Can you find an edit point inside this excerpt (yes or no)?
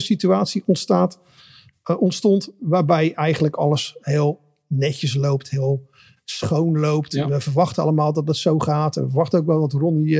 no